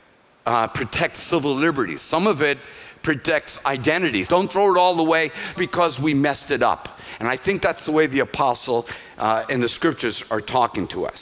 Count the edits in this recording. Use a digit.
2